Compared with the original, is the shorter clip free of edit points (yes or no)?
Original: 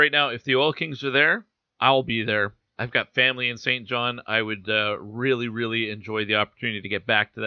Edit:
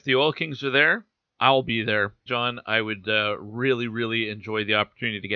no